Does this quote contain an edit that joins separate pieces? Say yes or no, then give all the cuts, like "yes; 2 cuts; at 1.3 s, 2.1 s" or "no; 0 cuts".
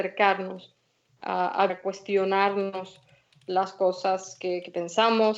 yes; 1 cut; at 1.7 s